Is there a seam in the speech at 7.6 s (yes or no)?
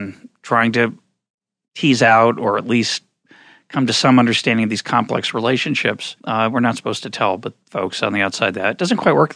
yes